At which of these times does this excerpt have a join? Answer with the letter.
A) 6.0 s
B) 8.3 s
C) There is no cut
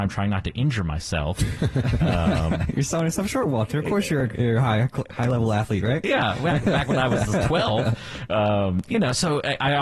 C